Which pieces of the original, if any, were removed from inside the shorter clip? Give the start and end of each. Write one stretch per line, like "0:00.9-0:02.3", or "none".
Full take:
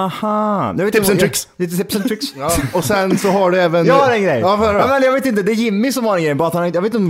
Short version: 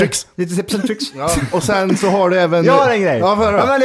none